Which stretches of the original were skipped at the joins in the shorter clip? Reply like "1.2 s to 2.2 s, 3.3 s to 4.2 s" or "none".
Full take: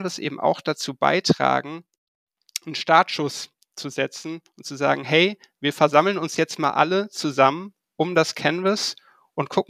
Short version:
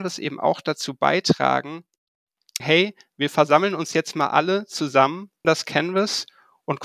2.6 s to 5.0 s, 7.9 s to 8.1 s